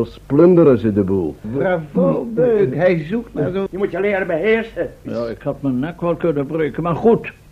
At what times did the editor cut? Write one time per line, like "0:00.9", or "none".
0:01.4
0:03.7
0:05.1

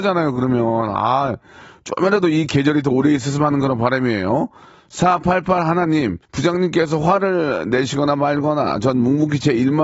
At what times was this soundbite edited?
0:06.2

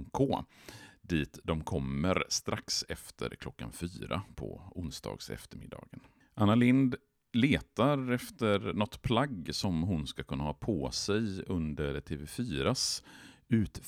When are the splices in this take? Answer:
none

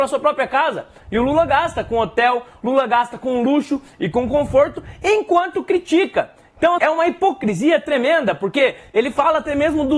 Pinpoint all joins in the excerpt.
0:06.8

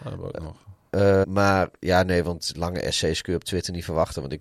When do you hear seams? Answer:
0:01.2

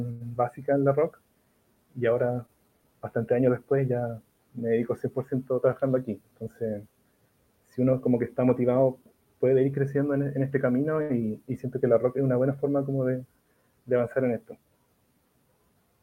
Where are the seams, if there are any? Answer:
none

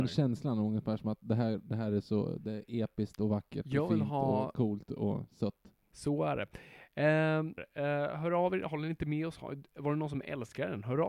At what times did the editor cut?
0:05.9
0:07.6

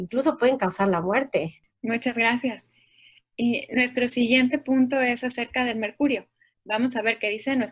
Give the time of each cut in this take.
0:01.7
0:06.5

